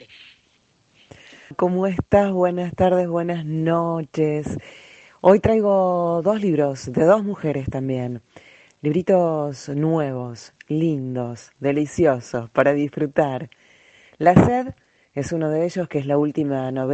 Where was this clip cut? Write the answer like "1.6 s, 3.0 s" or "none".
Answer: 1.5 s